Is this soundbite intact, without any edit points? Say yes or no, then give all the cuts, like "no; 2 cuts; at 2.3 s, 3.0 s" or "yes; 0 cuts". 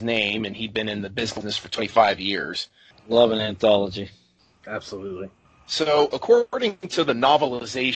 no; 1 cut; at 2.9 s